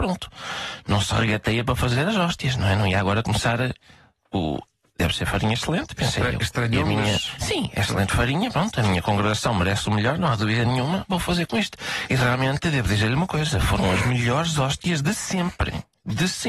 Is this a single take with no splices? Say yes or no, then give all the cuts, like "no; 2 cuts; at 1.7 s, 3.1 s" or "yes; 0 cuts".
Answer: yes; 0 cuts